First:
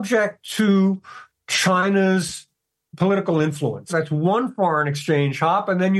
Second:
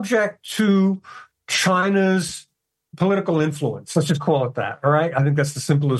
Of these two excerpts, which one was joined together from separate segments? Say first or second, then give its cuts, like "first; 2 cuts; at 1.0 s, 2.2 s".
first; 1 cut; at 3.9 s